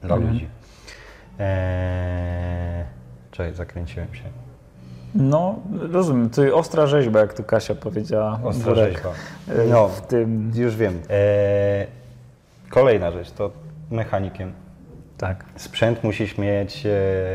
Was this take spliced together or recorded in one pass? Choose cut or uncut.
cut